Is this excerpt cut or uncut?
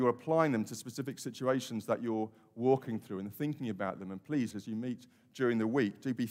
cut